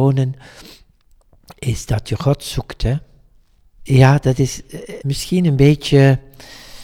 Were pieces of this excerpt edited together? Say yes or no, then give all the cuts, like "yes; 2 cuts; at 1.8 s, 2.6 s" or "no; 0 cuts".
yes; 2 cuts; at 3.8 s, 5.0 s